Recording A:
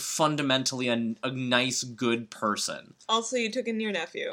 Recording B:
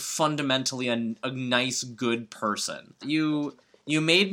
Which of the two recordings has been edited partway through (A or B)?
B